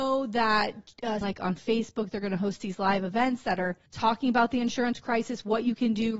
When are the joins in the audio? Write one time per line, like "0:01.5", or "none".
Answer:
0:01.2
0:03.9